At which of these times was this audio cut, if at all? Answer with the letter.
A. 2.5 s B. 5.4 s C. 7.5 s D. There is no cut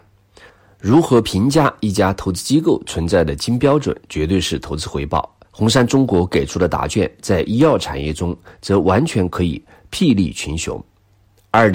B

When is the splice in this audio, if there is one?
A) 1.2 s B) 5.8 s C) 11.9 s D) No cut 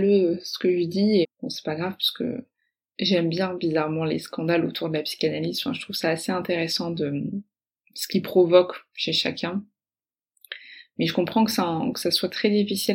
A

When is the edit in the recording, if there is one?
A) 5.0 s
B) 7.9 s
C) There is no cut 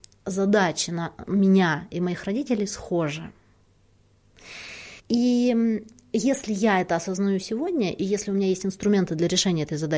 A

